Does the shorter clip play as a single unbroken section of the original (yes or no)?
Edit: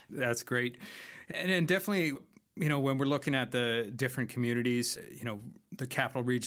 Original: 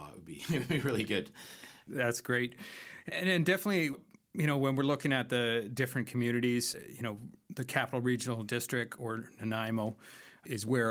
yes